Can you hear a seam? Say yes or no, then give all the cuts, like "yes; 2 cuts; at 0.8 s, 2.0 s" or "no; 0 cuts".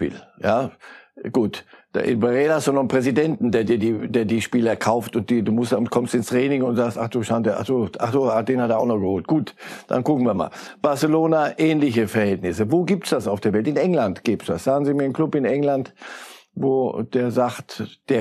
no; 0 cuts